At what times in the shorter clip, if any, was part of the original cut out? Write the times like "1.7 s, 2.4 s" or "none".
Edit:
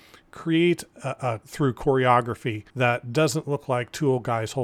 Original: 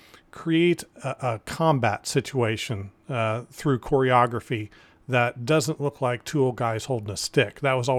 1.4 s, 2.7 s